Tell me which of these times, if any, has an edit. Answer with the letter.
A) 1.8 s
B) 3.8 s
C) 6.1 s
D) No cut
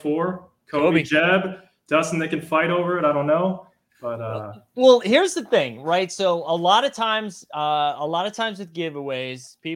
D